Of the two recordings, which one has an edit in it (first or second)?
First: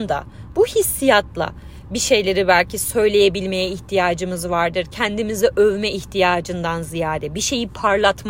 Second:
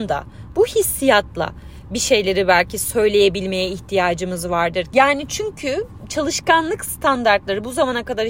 second